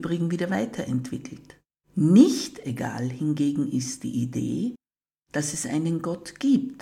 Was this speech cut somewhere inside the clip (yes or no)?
yes